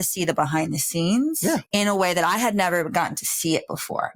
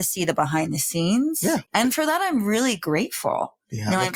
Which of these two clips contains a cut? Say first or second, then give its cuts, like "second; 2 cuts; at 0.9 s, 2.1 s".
second; 1 cut; at 1.7 s